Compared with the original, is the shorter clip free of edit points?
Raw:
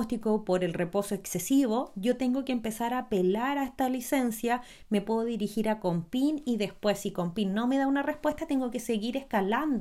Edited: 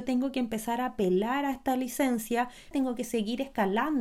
no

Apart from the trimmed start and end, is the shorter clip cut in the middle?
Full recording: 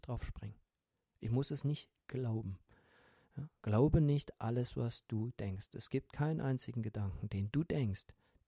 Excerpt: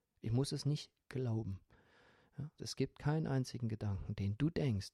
yes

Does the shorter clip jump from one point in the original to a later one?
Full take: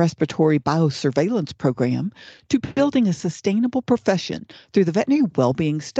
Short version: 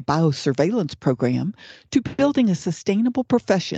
no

